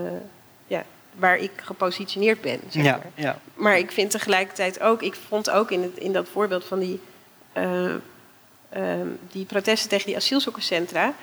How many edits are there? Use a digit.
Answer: 0